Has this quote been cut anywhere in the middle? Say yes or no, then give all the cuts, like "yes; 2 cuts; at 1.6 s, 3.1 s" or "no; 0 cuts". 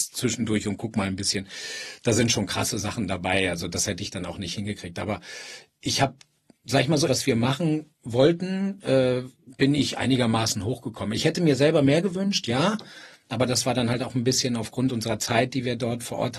yes; 1 cut; at 7.1 s